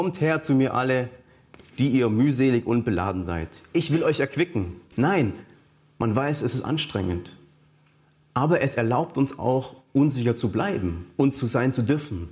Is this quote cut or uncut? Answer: cut